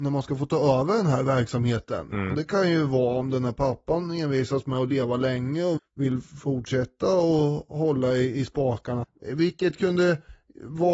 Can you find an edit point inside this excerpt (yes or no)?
yes